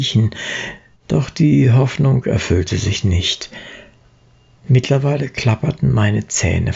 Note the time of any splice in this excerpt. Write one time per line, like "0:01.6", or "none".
0:00.9

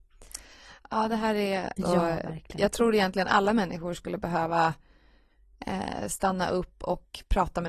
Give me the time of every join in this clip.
0:01.8

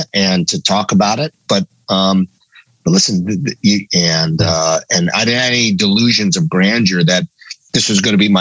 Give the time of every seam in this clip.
0:01.5
0:03.9

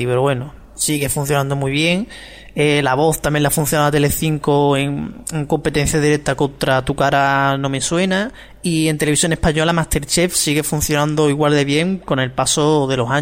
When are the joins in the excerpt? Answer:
none

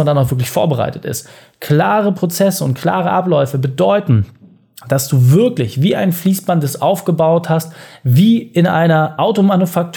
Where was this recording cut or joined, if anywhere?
none

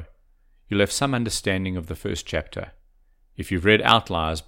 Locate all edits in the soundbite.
none

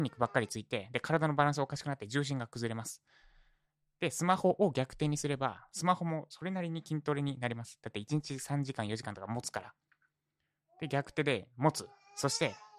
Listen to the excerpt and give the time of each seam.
none

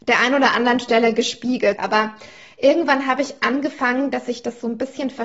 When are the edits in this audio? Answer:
0:01.8

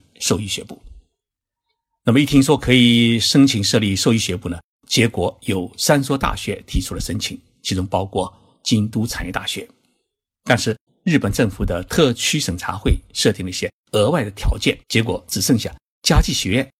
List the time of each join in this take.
0:10.9
0:14.8

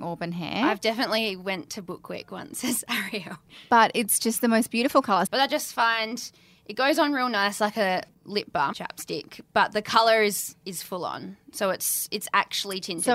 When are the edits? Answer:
0:05.3
0:08.7

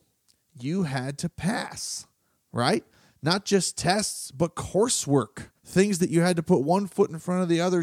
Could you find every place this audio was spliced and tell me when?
0:05.6

